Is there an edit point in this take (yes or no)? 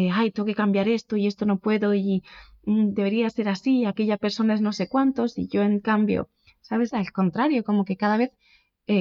yes